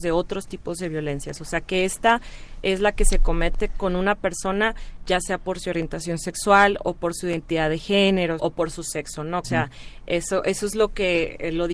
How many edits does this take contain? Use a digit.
2